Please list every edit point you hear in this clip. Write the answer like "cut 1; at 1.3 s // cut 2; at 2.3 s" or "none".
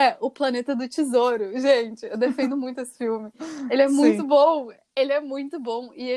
none